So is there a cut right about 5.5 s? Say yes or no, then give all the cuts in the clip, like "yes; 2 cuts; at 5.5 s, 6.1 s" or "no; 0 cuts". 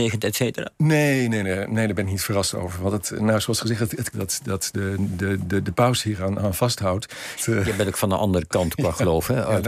no; 2 cuts; at 4.1 s, 7.4 s